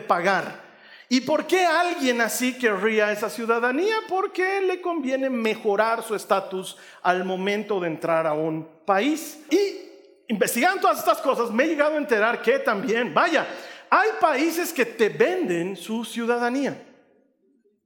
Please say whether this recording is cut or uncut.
cut